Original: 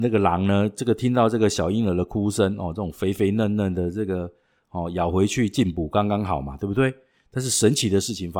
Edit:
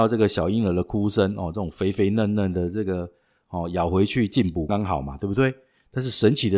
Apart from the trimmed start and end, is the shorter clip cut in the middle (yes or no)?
yes